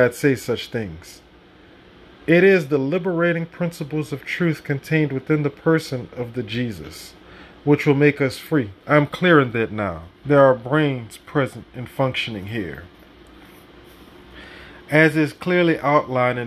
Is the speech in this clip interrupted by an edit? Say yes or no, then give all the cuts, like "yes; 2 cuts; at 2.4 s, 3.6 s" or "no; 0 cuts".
yes; 2 cuts; at 8.8 s, 10.2 s